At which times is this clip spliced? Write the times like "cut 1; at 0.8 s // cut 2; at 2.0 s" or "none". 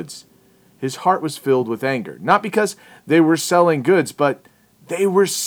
none